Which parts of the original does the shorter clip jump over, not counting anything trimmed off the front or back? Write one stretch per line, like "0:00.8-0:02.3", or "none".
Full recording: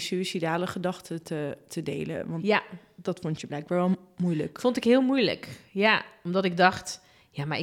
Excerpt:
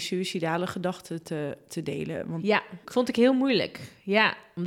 0:02.8-0:04.5